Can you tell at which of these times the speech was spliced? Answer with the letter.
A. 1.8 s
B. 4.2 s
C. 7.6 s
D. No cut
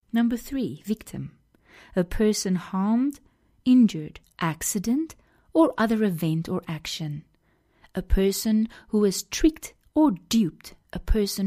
B